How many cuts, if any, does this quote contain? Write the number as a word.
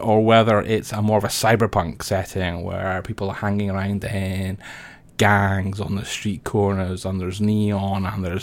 zero